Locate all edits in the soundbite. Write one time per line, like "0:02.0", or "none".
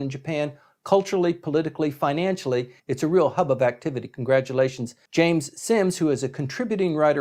0:02.8